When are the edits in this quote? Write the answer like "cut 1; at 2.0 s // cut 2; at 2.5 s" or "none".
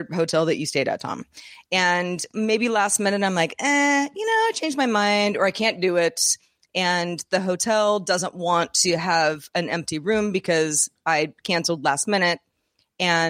none